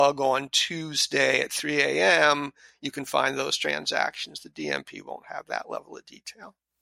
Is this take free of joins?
yes; 0 cuts

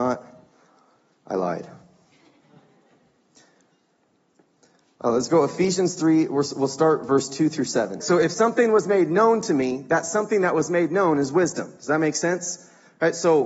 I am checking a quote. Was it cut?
yes; 1 cut; at 8.0 s

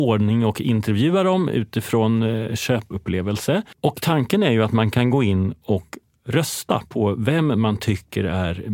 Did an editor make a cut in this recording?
no; 0 cuts

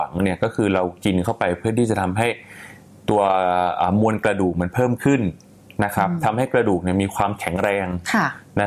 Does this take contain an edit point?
no; 0 cuts

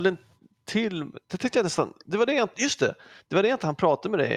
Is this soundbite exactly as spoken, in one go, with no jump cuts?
yes; 0 cuts

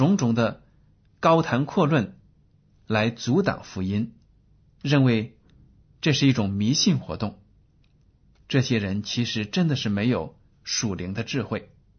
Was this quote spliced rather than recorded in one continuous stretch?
no; 0 cuts

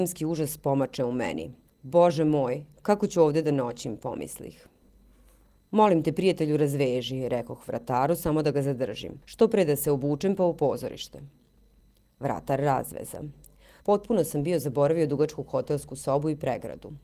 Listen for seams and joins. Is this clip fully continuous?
no; 1 cut; at 13.8 s

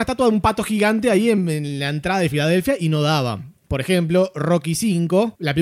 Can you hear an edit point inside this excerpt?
yes; 1 cut; at 3.6 s

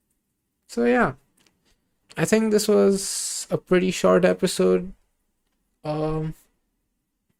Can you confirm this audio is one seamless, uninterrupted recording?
no; 1 cut; at 2.0 s

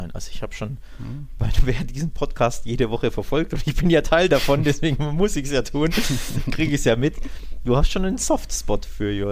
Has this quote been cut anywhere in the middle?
no; 0 cuts

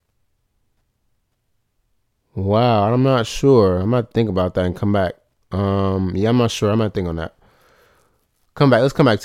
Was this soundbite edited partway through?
no; 0 cuts

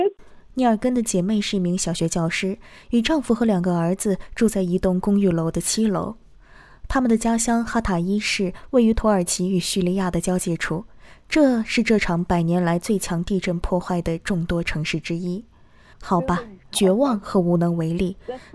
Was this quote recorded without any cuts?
no; 1 cut; at 15.9 s

